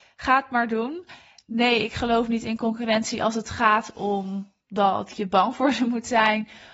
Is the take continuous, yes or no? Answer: yes